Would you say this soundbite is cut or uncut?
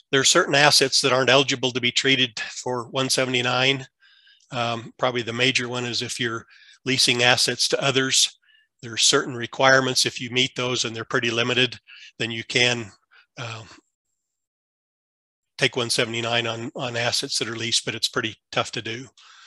uncut